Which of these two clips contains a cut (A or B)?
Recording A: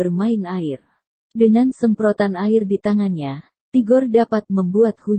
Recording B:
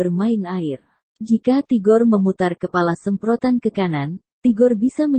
B